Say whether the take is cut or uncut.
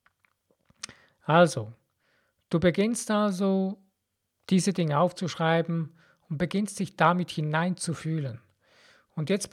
uncut